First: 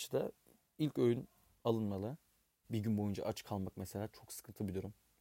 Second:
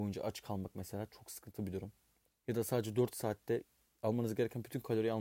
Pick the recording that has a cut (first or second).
first